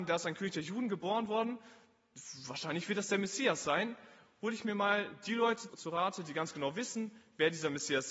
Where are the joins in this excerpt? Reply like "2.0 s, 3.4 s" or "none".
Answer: 5.7 s